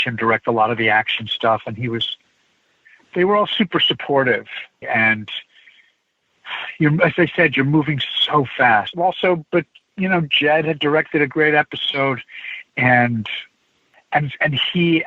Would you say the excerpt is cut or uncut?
cut